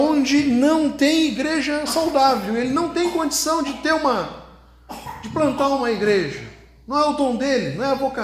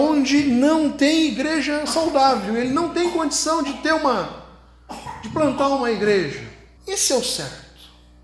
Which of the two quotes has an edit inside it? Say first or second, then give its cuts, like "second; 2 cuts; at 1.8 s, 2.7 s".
second; 1 cut; at 6.8 s